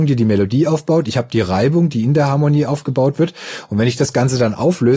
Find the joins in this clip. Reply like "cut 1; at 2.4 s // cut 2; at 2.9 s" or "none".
none